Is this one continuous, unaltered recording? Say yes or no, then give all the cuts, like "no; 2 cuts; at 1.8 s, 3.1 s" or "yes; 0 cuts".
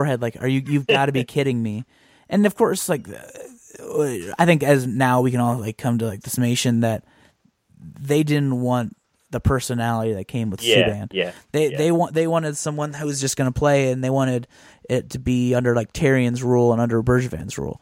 yes; 0 cuts